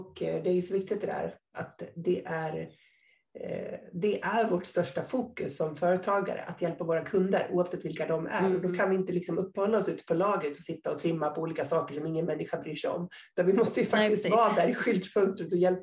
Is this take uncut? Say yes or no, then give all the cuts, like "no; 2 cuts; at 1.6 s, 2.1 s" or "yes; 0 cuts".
yes; 0 cuts